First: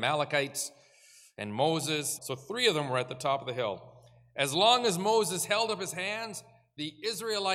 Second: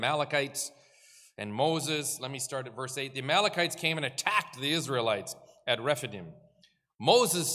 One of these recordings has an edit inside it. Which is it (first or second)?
first